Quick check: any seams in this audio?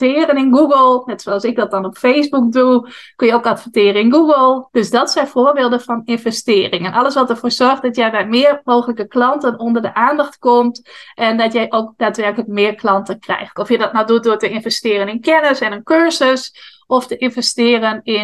yes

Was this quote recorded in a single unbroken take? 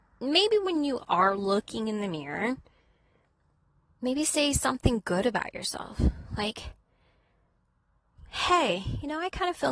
no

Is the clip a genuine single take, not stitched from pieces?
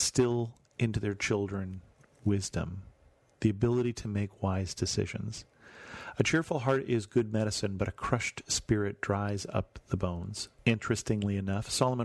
no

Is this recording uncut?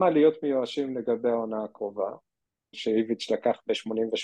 no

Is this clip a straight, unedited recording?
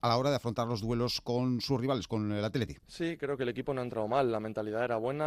no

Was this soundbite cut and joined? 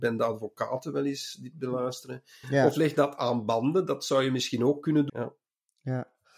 yes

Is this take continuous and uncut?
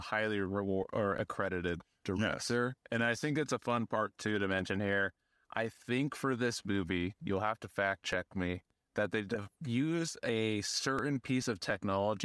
yes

